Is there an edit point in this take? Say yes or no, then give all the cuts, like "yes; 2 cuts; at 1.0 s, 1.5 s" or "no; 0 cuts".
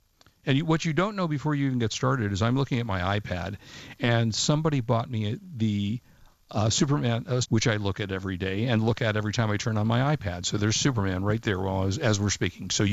yes; 1 cut; at 7.4 s